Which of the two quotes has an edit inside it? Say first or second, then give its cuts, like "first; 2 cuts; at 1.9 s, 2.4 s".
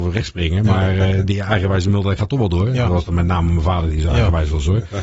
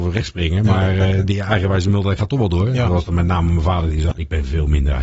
second; 1 cut; at 4.1 s